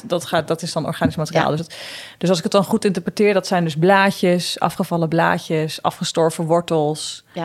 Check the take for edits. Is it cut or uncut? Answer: uncut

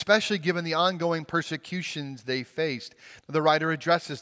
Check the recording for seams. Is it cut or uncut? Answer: cut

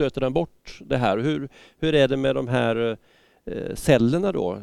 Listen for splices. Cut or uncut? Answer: uncut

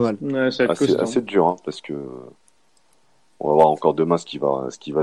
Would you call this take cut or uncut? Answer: uncut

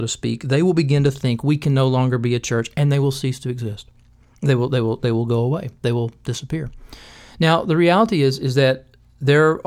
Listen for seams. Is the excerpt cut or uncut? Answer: uncut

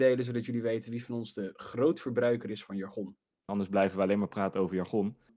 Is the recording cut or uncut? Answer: cut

